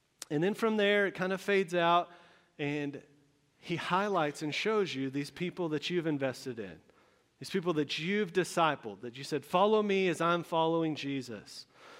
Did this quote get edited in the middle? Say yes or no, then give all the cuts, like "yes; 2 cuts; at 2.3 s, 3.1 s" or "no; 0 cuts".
no; 0 cuts